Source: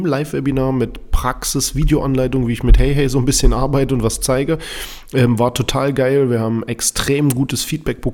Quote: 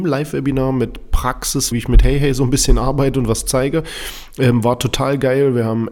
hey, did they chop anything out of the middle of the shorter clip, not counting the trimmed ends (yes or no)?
yes